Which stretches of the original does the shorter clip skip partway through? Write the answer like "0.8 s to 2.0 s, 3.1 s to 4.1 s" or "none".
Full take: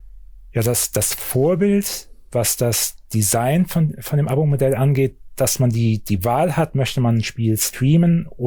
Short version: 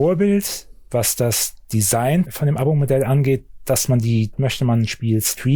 3.7 s to 4.0 s, 6.0 s to 6.7 s